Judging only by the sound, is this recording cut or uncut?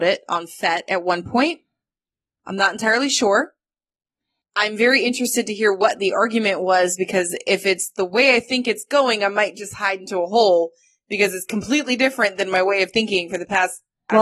uncut